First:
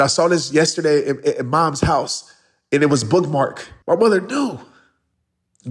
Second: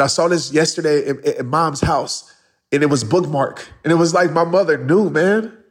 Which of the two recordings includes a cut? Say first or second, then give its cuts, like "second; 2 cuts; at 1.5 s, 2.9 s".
first; 1 cut; at 3.8 s